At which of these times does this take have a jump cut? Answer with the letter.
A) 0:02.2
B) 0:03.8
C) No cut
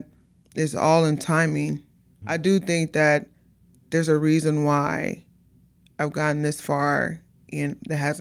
A